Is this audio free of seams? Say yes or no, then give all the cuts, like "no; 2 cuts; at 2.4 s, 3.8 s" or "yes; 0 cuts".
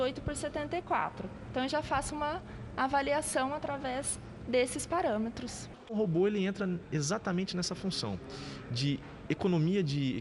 no; 1 cut; at 5.8 s